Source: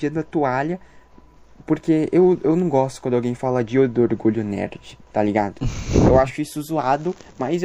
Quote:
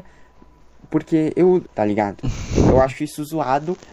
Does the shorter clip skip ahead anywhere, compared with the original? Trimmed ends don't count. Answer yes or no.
yes